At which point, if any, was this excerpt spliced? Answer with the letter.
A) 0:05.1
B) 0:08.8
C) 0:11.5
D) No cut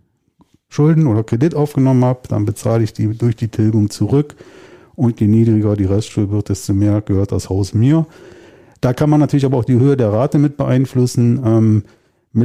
D